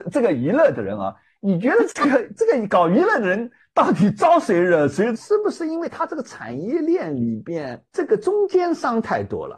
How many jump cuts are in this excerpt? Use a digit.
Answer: 2